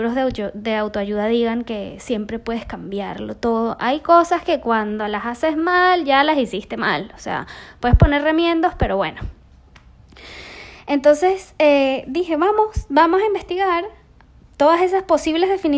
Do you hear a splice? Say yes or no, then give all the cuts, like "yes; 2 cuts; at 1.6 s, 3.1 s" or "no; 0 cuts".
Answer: no; 0 cuts